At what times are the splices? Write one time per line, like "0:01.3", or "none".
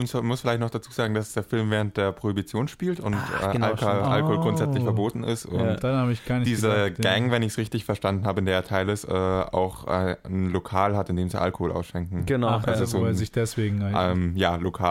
none